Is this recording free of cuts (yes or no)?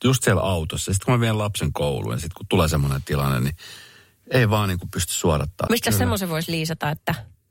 no